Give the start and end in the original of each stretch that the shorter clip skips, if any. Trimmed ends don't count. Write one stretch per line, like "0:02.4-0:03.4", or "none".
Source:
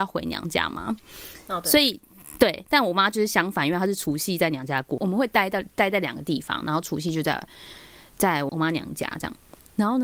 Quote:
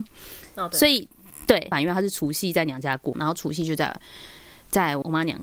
0:02.6-0:03.6
0:05.0-0:06.6